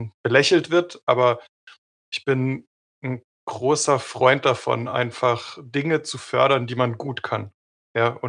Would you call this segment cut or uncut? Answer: uncut